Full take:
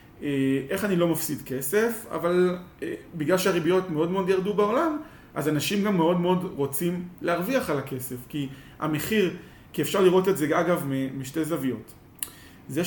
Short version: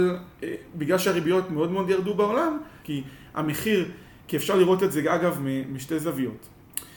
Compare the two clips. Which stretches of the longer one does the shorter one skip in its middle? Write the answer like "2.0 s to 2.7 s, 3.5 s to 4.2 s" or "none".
5.2 s to 8.3 s